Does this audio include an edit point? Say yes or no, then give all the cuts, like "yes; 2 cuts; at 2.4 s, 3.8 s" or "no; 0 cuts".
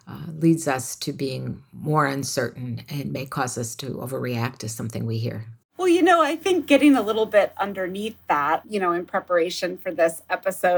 yes; 2 cuts; at 5.6 s, 8.6 s